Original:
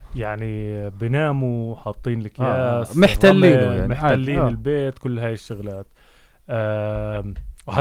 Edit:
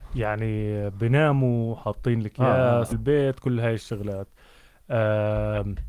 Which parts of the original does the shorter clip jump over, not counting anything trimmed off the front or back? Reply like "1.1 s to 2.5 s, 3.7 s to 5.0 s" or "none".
2.9 s to 4.5 s